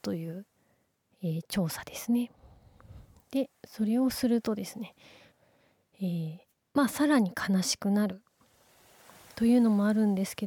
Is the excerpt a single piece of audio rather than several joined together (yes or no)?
yes